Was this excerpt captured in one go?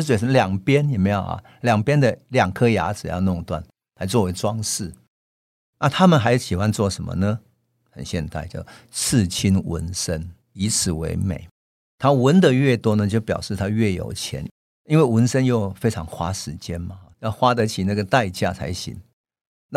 no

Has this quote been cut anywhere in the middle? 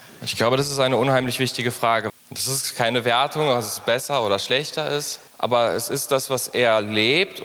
yes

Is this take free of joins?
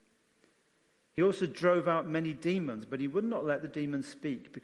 yes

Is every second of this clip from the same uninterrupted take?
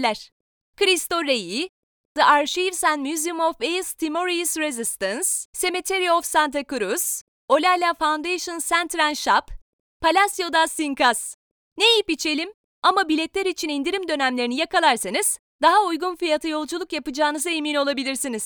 no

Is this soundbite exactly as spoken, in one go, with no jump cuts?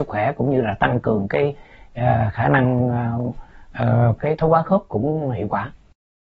no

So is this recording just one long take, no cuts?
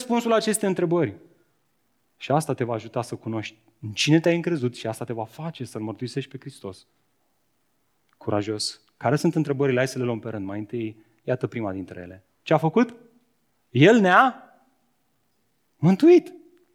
no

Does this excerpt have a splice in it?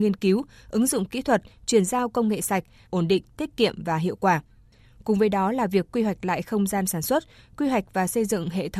yes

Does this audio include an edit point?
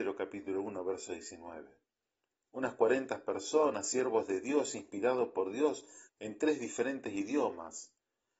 yes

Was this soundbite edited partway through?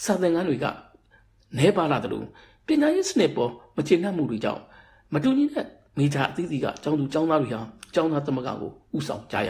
no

